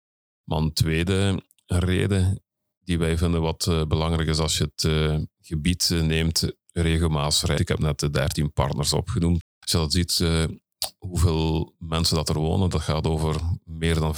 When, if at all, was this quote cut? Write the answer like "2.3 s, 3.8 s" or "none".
7.6 s, 9.4 s